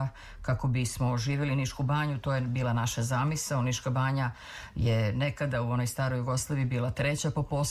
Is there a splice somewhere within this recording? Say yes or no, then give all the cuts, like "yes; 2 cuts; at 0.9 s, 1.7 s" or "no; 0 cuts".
no; 0 cuts